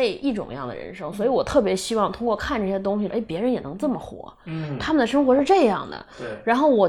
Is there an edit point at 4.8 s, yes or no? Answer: no